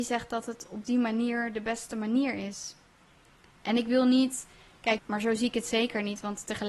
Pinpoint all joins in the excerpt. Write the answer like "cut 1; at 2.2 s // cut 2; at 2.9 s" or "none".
cut 1; at 3.6 s // cut 2; at 5.0 s